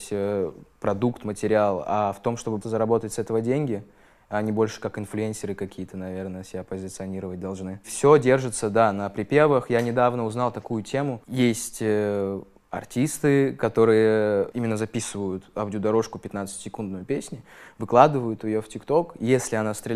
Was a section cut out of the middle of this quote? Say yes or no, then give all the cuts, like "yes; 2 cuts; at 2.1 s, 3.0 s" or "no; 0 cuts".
yes; 1 cut; at 2.6 s